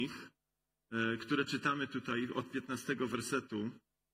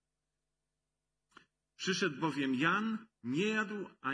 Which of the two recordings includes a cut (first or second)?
second